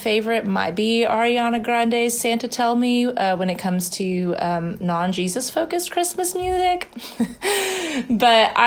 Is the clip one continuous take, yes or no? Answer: yes